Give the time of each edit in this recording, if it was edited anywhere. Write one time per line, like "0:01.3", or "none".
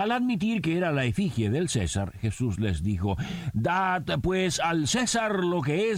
none